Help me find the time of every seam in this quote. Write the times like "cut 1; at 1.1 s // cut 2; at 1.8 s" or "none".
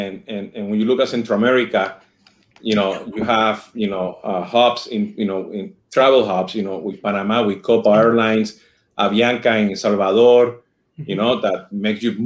none